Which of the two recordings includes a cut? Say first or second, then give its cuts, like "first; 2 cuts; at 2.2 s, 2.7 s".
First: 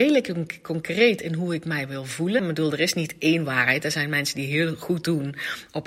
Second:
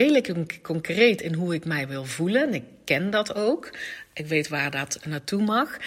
first; 1 cut; at 2.4 s